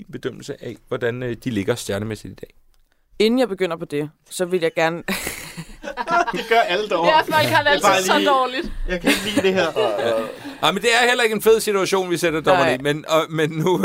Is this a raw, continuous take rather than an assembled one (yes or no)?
yes